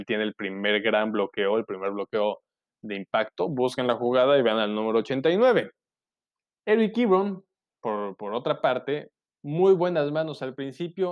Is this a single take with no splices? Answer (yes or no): yes